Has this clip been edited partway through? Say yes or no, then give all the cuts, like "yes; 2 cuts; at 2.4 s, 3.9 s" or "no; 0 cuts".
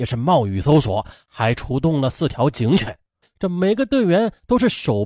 yes; 1 cut; at 3.2 s